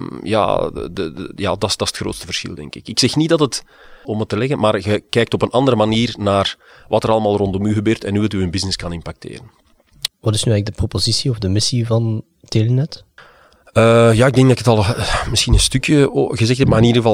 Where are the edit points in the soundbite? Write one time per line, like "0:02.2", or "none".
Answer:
0:04.0
0:10.1